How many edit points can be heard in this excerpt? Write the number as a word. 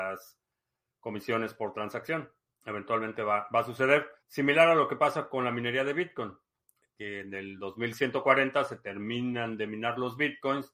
one